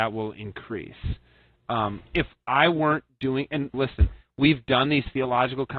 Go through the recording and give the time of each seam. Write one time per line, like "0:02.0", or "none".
0:02.1
0:03.7